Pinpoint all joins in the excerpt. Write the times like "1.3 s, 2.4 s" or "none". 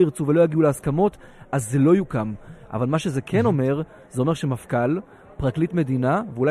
none